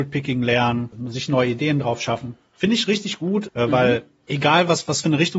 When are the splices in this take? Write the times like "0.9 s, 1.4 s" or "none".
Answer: 0.9 s, 3.5 s